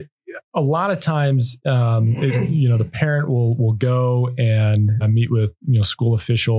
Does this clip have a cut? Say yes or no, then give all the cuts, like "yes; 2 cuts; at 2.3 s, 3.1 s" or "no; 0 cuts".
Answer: yes; 2 cuts; at 1.6 s, 5.0 s